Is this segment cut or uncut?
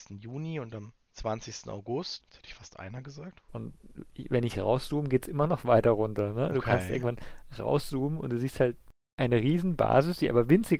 cut